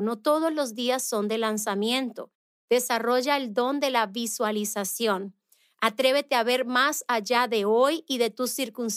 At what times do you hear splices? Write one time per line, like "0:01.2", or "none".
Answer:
0:02.5